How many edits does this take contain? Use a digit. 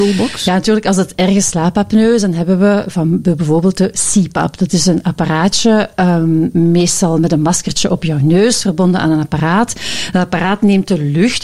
0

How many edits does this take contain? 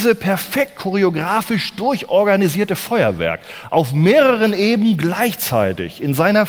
0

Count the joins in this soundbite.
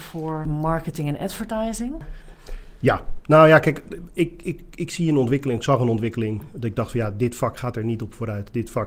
0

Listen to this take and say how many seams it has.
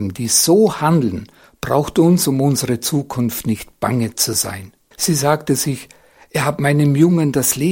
1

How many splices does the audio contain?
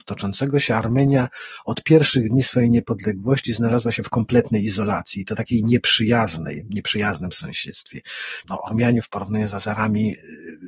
1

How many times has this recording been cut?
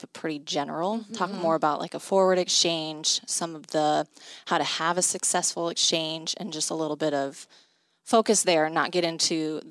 0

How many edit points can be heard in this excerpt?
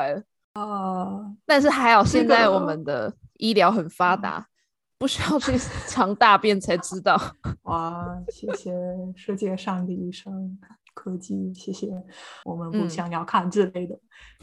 1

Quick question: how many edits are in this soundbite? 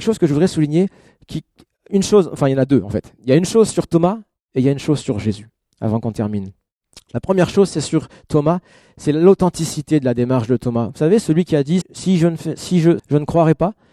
2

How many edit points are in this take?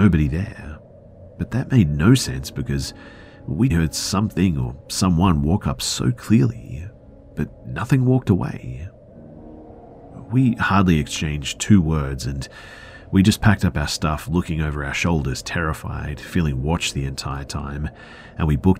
1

